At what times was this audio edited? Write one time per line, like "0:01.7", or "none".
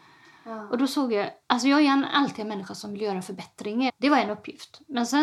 0:01.4
0:03.9